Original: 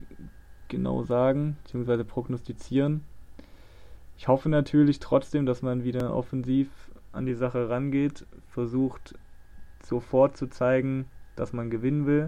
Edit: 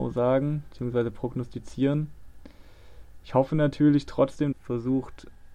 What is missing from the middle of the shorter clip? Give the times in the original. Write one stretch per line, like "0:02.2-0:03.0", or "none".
0:05.5-0:08.4